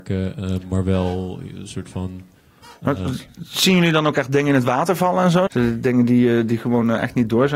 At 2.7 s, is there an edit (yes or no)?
no